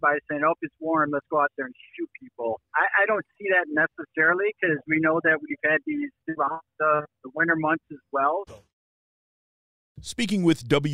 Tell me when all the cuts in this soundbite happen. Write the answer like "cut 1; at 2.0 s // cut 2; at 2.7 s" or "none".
cut 1; at 8.5 s